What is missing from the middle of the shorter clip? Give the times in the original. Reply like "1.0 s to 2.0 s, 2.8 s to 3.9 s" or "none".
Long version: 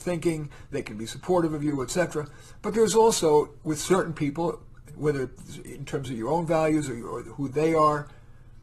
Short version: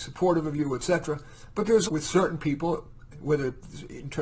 2.9 s to 3.6 s